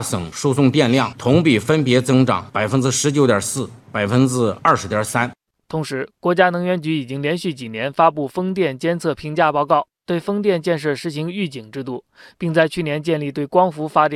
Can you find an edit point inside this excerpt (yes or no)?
no